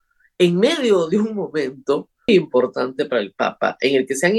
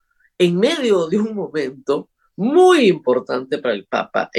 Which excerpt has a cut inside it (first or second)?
first